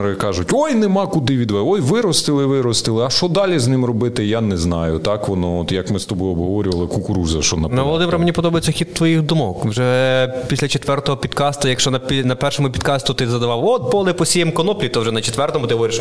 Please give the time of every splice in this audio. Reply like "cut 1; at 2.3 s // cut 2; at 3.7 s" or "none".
none